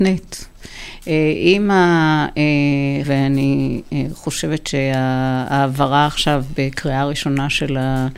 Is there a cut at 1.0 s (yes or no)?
no